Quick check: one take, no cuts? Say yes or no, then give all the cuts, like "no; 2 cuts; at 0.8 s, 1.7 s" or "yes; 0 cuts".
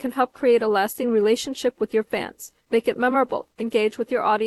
no; 1 cut; at 3.5 s